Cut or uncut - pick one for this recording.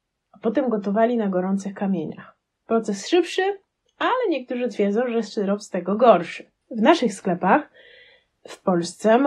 cut